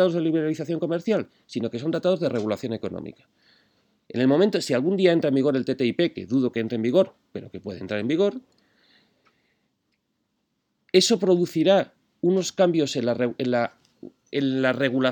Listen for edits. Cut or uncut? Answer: uncut